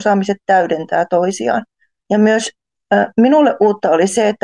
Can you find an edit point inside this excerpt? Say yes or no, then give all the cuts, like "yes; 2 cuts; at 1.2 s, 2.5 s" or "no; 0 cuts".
yes; 1 cut; at 2.0 s